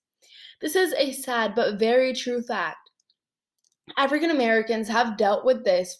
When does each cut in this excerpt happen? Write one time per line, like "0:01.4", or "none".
none